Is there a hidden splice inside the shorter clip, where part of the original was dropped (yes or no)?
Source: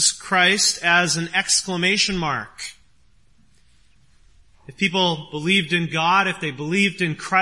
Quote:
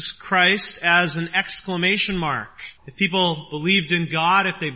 yes